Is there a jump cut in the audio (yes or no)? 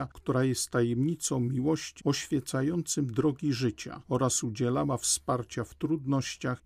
yes